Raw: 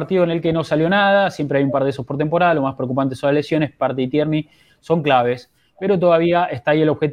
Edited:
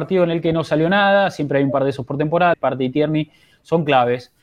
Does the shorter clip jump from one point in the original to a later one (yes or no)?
yes